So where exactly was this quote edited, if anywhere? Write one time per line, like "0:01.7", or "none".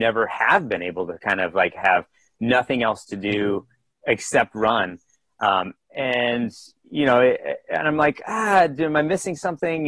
none